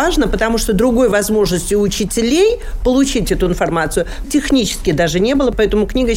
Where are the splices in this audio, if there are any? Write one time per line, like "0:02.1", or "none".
0:04.2